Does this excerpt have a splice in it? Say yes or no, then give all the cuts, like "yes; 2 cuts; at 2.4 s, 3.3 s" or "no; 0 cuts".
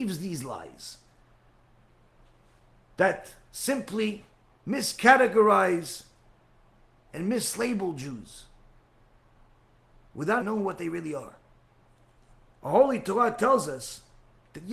yes; 1 cut; at 10.4 s